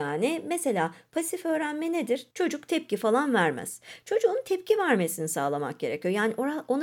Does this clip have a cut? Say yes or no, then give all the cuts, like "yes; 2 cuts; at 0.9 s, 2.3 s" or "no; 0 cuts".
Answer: yes; 1 cut; at 2.3 s